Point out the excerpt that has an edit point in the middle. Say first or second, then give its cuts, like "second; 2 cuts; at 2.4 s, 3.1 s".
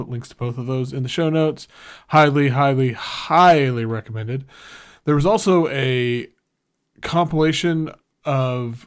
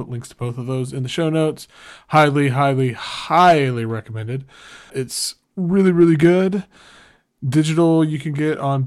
second; 1 cut; at 4.9 s